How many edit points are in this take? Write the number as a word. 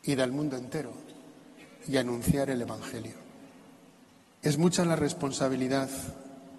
one